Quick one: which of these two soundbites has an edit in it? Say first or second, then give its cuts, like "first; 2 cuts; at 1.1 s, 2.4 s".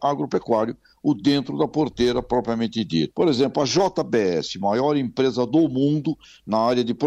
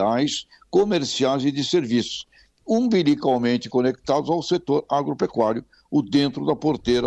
first; 1 cut; at 3.1 s